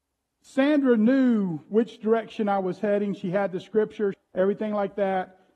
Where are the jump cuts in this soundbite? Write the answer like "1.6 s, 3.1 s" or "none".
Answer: 4.1 s